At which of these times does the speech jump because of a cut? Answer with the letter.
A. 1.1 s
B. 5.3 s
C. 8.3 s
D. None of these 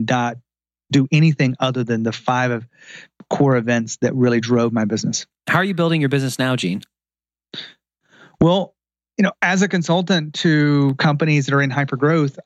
B